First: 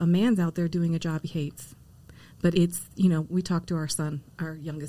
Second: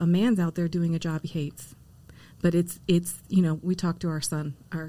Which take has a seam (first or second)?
first